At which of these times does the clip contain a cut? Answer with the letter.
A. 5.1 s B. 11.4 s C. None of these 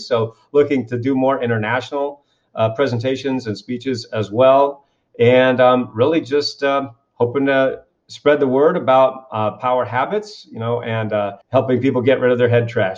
B